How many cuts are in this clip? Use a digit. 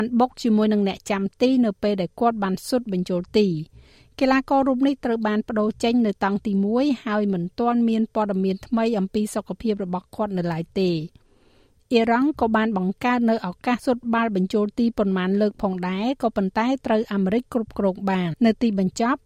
2